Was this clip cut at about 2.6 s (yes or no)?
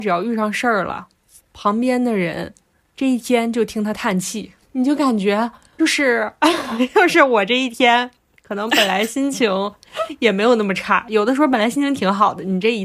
no